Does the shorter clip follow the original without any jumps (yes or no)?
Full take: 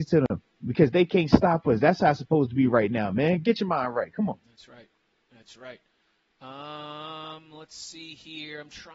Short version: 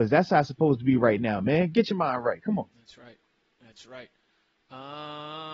yes